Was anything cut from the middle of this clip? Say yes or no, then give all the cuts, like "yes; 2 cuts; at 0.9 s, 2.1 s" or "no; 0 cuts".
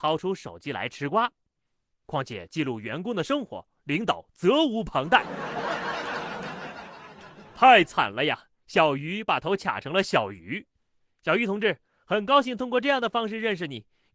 yes; 1 cut; at 1.9 s